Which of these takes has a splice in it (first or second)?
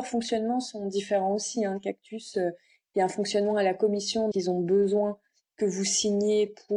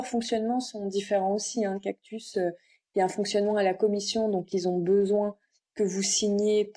first